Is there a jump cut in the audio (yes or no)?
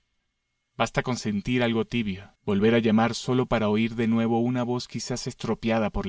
yes